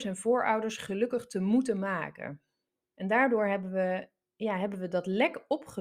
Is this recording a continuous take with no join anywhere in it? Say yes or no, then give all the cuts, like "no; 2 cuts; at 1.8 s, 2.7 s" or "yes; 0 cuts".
no; 1 cut; at 2.9 s